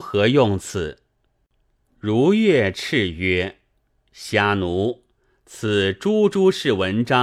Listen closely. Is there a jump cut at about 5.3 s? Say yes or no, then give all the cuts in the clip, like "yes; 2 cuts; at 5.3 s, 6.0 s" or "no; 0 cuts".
no; 1 cut; at 1.4 s